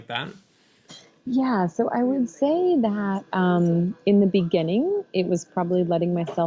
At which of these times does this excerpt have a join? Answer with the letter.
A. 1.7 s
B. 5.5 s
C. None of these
C